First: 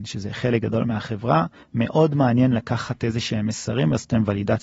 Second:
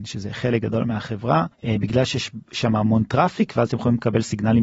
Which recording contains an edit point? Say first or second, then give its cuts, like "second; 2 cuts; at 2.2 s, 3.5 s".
second; 1 cut; at 1.5 s